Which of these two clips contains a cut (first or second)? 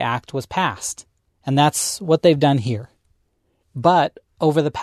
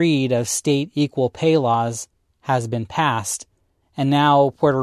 first